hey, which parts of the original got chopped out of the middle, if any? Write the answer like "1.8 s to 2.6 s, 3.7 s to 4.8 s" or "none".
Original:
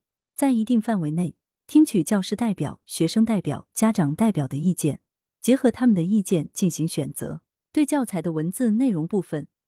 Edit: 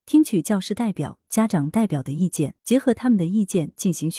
2.8 s to 3.7 s, 5.0 s to 5.4 s